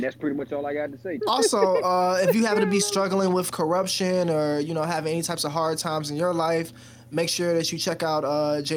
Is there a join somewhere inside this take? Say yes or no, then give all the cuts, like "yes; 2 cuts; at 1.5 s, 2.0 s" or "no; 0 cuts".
yes; 1 cut; at 1.2 s